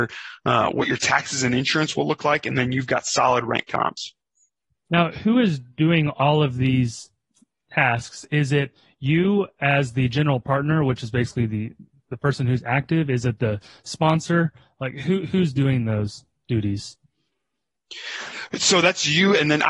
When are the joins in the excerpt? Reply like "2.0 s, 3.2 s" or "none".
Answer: none